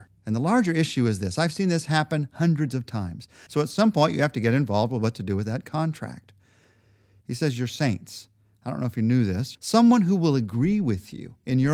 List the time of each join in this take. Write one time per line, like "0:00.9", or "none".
0:03.5
0:07.2
0:09.5